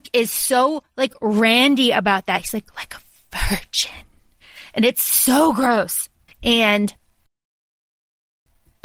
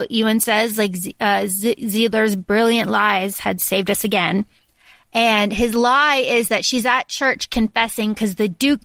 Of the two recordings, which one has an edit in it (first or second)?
first